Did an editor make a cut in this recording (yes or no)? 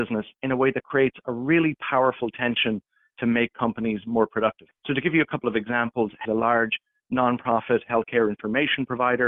yes